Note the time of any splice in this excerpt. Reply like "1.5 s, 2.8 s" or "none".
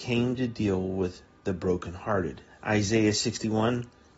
2.5 s